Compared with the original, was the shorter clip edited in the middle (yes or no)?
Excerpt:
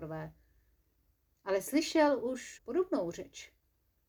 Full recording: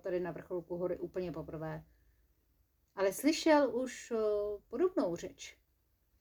yes